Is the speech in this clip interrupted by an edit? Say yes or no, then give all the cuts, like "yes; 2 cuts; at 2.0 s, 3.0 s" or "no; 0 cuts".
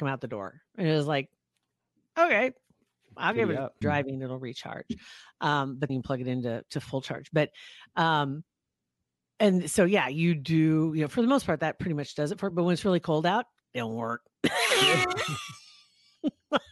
yes; 2 cuts; at 3.8 s, 5.9 s